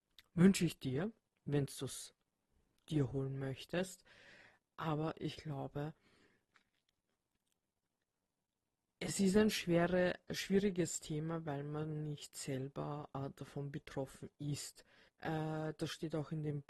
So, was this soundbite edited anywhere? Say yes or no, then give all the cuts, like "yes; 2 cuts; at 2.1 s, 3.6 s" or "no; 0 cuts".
yes; 1 cut; at 15.1 s